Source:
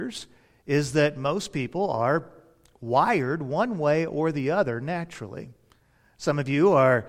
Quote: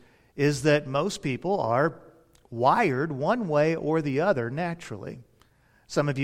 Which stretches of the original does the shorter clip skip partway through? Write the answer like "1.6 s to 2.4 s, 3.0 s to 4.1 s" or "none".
none